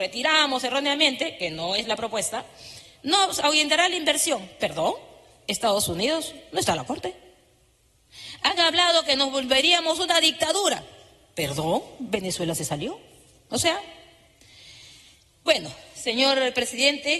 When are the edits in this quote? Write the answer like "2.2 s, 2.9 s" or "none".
none